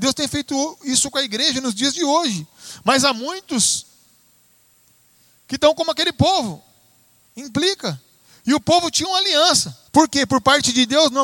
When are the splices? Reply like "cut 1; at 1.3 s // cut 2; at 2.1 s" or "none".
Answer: cut 1; at 7.3 s // cut 2; at 9.9 s

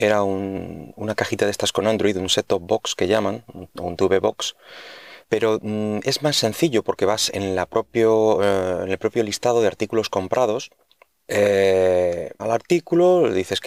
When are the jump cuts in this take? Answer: cut 1; at 5.2 s // cut 2; at 11.3 s // cut 3; at 12.4 s

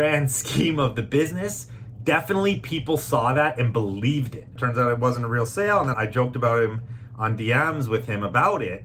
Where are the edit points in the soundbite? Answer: cut 1; at 4.6 s // cut 2; at 5.9 s

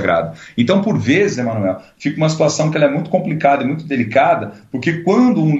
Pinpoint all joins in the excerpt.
none

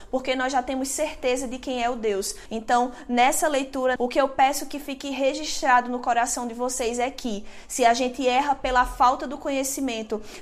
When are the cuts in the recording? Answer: cut 1; at 2.5 s // cut 2; at 4.0 s

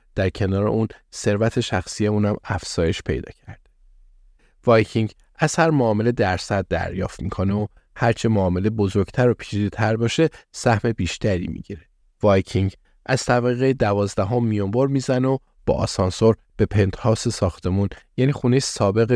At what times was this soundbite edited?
cut 1; at 12.0 s

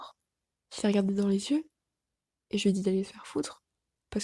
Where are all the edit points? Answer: none

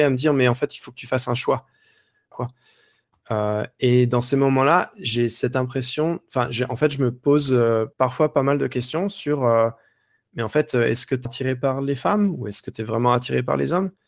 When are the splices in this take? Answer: cut 1; at 2.3 s // cut 2; at 7.9 s // cut 3; at 11.3 s

